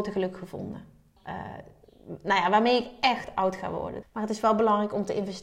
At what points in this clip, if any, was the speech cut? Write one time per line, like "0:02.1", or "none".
0:01.2
0:04.0